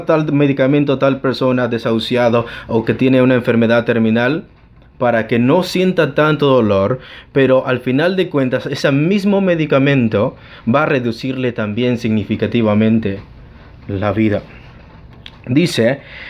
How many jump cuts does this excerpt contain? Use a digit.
0